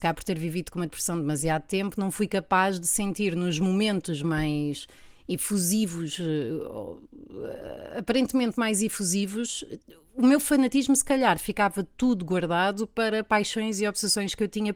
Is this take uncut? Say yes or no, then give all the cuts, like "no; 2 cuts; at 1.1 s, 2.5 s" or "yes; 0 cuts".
yes; 0 cuts